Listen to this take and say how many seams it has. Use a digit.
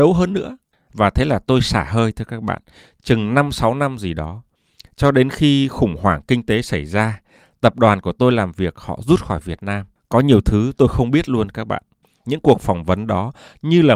1